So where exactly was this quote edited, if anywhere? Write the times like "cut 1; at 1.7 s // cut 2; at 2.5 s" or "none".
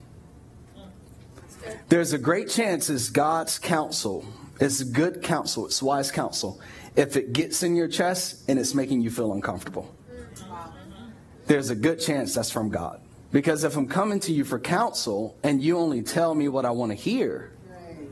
cut 1; at 13.2 s